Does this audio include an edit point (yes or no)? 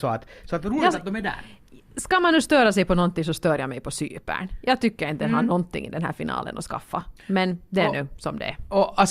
no